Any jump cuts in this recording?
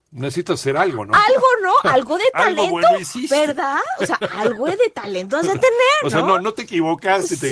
no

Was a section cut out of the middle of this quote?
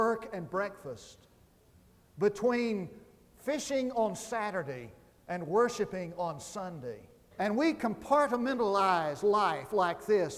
yes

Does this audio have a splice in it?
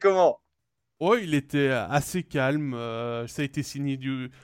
yes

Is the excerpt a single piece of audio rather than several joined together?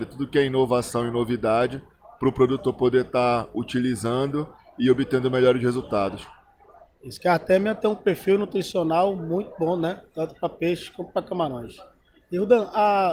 yes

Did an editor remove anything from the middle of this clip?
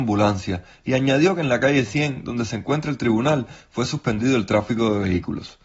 no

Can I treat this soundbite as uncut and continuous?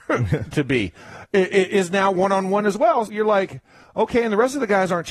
no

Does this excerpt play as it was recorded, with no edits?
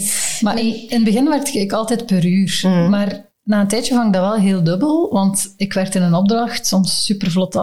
yes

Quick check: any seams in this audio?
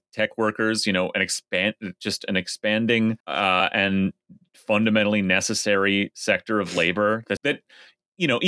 yes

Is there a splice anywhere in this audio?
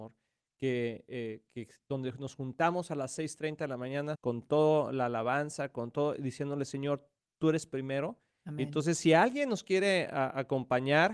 yes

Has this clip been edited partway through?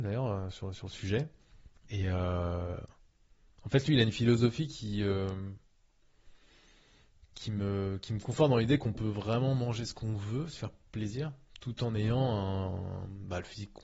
no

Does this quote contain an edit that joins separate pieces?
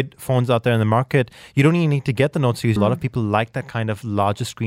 yes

